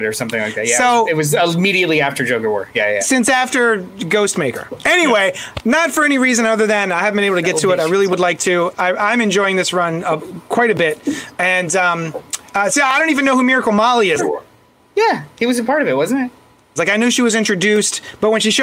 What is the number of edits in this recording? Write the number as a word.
two